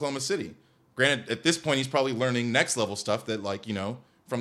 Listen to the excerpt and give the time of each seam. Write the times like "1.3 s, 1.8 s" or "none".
none

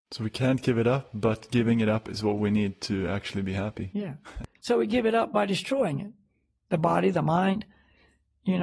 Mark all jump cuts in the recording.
4.6 s

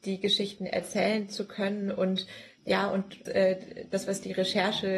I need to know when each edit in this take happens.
3.3 s

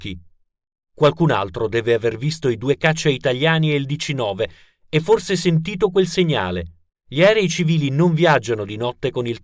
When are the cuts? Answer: 6.9 s

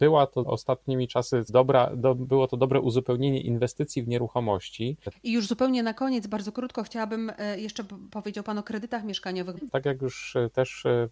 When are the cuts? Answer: 5.1 s, 9.7 s

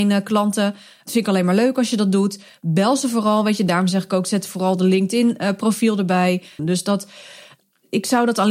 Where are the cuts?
6.6 s

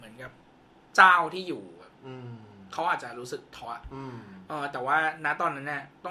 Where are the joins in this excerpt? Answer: 3.7 s

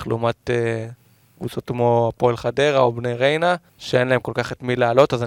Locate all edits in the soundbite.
3.7 s

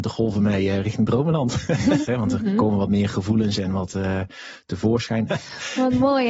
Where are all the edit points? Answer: 2.1 s, 5.3 s

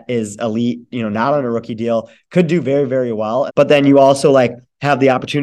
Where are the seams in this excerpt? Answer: 3.5 s

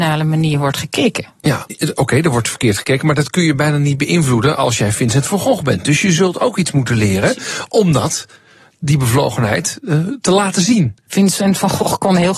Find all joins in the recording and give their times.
1.7 s, 11.1 s

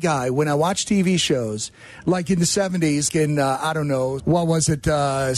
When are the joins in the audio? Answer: 3.1 s, 4.2 s

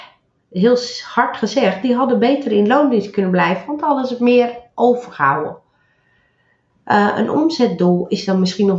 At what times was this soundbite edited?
6.7 s

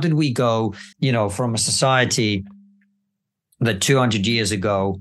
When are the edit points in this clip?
0.9 s

